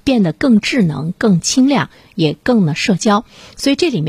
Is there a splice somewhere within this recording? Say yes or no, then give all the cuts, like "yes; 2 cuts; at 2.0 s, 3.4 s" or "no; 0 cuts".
no; 0 cuts